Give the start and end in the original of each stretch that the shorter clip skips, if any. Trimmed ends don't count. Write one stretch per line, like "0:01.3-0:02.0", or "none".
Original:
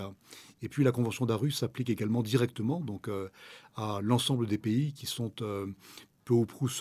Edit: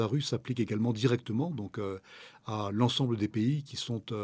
none